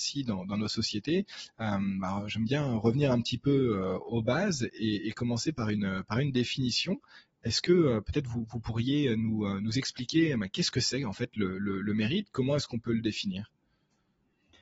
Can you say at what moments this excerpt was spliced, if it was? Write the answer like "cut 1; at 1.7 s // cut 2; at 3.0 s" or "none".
none